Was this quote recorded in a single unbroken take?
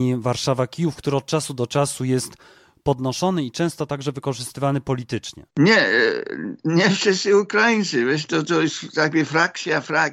no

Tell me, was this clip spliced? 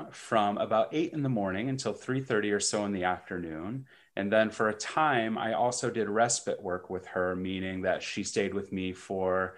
no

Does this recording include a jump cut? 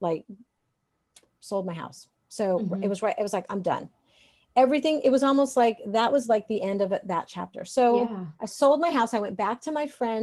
no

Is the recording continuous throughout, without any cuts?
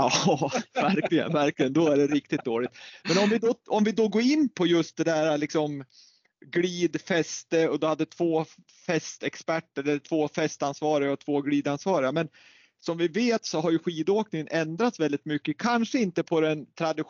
yes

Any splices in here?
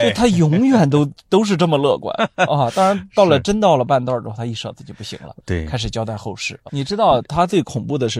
yes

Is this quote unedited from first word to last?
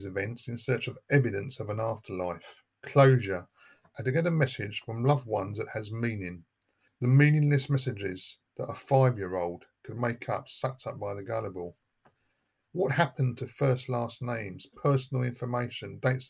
no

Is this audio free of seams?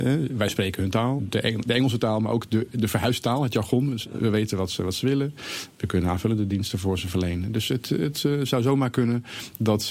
no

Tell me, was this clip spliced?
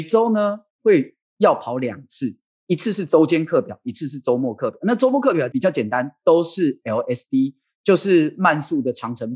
no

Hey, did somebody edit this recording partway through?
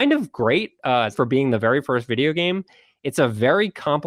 yes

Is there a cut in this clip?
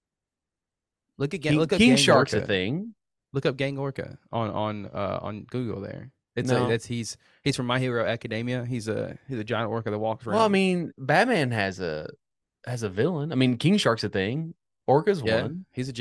no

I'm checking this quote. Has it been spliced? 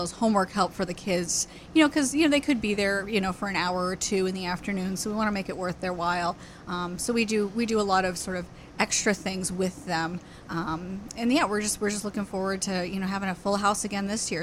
no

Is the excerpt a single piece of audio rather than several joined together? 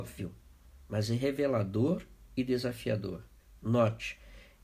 yes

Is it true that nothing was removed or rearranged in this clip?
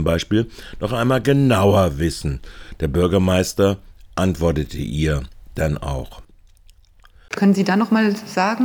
no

